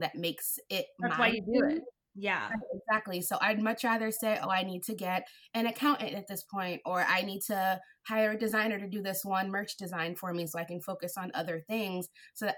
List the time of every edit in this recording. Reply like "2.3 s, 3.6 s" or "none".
none

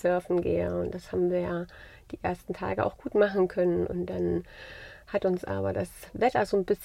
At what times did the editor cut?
none

